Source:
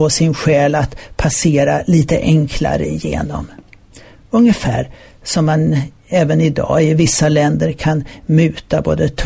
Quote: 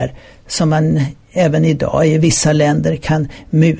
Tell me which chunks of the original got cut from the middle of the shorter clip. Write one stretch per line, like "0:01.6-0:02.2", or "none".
none